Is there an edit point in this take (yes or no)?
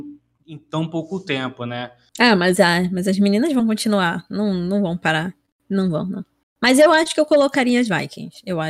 yes